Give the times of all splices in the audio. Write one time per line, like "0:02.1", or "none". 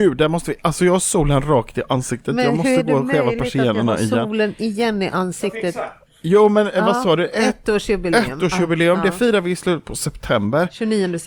none